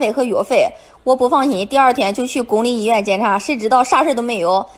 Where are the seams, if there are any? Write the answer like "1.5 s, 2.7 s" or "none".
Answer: none